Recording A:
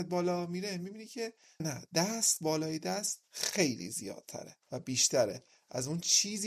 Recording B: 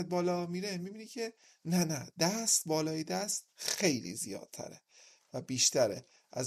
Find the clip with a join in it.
A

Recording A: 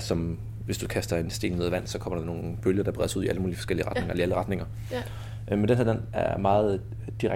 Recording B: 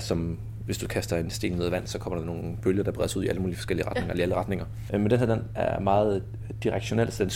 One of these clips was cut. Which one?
B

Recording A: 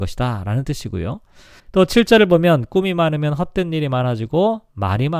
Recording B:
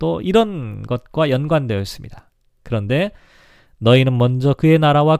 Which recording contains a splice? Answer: A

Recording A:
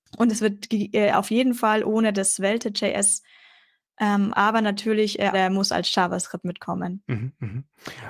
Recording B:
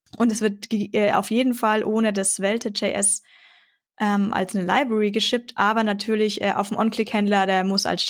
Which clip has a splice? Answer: A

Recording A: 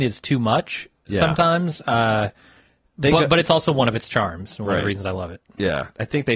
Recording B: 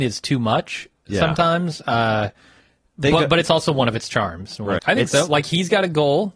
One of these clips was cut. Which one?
B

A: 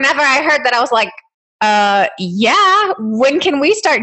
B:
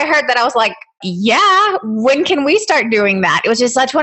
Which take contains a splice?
B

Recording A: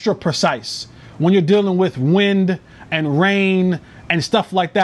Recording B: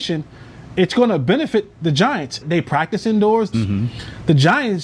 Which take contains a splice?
B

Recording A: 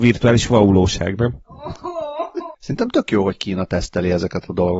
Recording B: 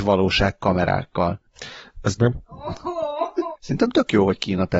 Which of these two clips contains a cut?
B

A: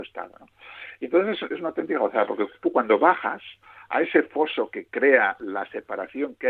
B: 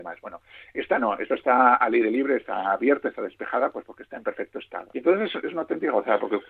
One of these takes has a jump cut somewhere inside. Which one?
B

